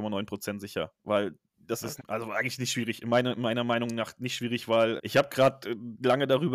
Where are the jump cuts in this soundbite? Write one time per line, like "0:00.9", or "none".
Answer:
0:02.0
0:05.0